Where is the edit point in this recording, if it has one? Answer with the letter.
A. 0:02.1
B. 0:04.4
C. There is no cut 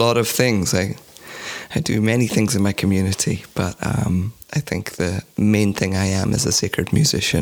B